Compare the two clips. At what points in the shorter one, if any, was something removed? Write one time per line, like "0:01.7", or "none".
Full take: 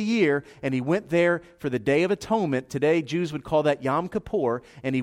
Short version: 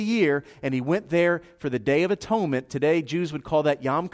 none